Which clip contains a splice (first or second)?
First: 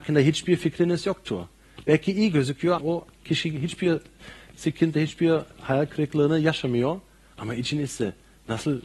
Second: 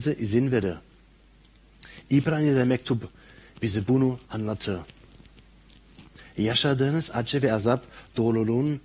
first